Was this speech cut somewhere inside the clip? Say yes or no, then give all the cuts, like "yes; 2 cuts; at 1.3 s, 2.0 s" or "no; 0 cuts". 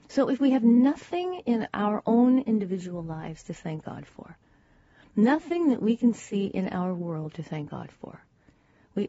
no; 0 cuts